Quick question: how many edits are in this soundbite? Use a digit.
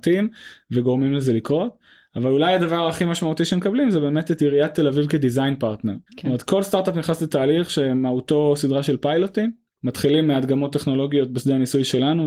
2